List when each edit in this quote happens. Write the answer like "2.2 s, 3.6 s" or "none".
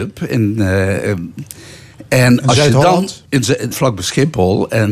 3.7 s